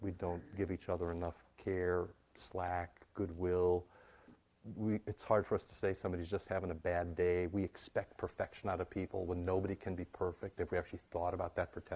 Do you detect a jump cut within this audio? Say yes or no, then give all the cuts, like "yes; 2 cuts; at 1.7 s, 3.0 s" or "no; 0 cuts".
no; 0 cuts